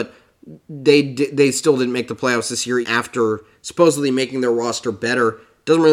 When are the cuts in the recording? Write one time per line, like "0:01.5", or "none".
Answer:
0:02.8